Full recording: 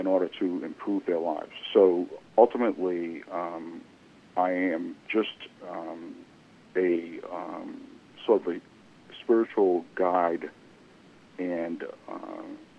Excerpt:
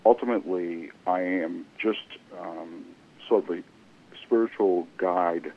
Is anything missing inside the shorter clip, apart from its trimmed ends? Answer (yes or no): yes